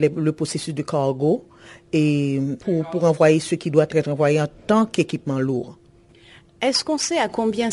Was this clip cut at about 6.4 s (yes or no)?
no